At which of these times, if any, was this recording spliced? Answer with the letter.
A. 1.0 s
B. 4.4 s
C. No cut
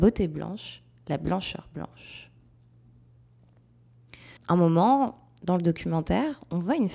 B